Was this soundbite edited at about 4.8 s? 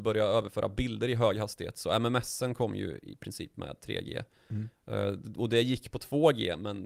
no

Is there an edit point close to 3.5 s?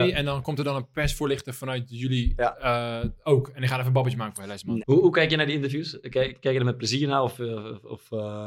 no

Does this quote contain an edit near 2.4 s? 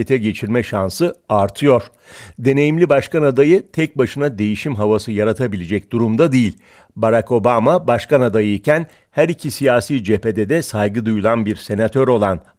no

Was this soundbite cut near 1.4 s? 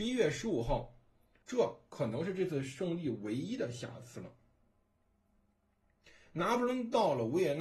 yes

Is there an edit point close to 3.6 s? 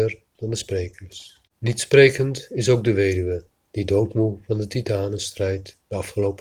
yes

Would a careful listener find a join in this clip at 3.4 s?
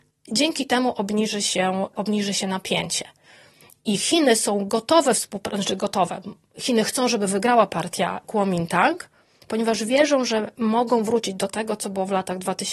no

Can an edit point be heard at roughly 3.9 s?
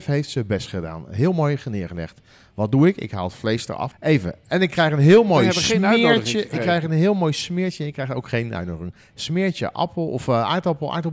yes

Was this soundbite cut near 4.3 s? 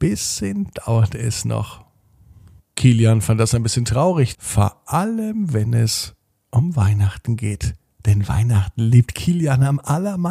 yes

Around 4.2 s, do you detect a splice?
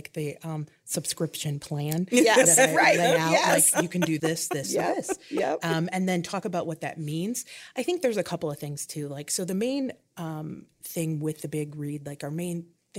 yes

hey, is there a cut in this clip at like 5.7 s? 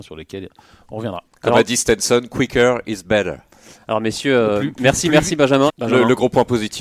yes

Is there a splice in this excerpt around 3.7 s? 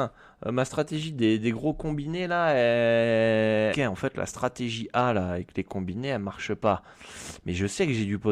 yes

